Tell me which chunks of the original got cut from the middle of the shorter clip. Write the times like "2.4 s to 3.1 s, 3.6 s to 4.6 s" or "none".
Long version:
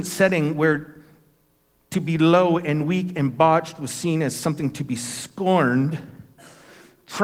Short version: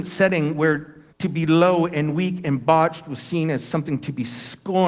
1.1 s to 1.8 s